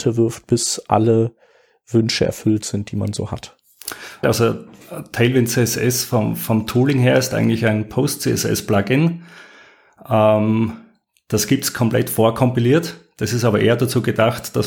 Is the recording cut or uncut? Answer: cut